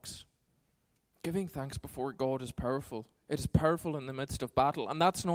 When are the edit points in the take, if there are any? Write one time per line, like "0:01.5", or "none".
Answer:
none